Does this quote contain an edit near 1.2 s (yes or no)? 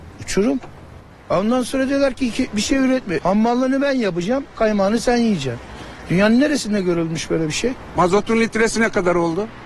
no